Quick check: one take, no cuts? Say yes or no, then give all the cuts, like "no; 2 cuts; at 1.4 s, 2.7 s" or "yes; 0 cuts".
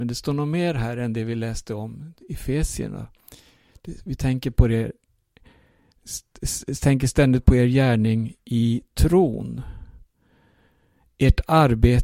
yes; 0 cuts